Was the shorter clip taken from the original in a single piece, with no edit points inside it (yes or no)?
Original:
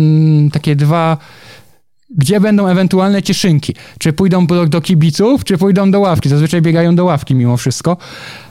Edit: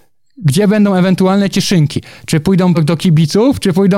no